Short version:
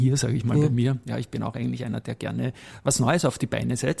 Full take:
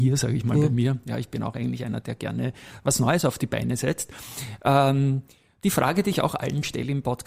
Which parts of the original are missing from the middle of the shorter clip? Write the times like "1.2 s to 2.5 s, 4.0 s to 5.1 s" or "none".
none